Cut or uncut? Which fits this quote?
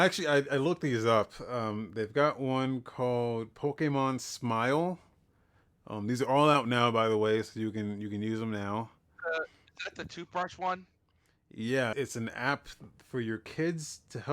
cut